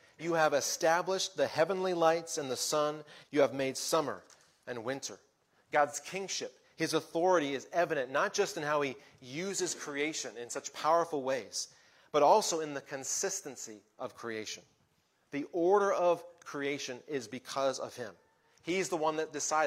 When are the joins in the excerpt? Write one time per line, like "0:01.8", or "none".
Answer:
0:03.2